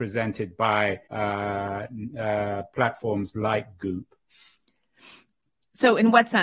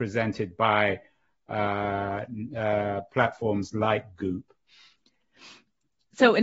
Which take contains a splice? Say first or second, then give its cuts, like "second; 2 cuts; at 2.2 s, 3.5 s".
first; 1 cut; at 1.0 s